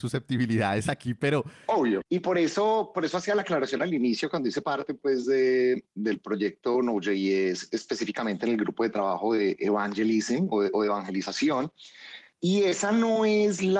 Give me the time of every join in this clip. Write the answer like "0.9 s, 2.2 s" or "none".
2.0 s, 12.3 s